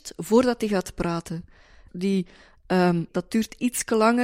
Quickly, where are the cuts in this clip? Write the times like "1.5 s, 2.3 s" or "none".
1.9 s, 3.1 s